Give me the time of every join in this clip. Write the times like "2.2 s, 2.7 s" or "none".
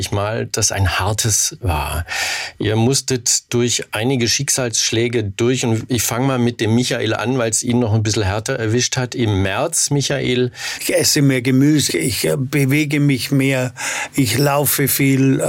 10.7 s, 11.9 s